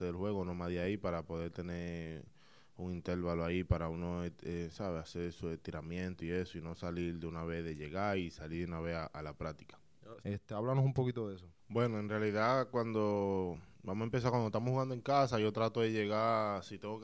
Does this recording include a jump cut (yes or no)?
yes